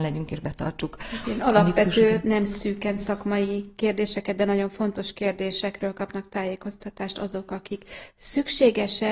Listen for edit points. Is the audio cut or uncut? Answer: uncut